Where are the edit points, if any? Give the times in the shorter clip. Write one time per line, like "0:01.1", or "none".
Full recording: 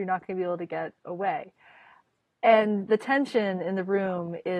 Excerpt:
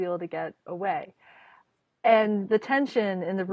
none